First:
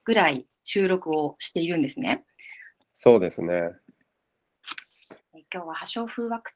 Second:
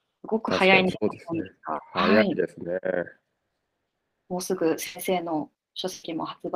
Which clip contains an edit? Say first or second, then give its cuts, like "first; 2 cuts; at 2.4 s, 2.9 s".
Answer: first; 2 cuts; at 2.8 s, 5.2 s